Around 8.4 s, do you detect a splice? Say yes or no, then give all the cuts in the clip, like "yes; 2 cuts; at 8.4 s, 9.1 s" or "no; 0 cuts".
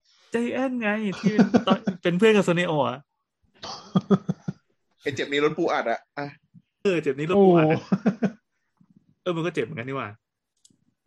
no; 1 cut; at 6.8 s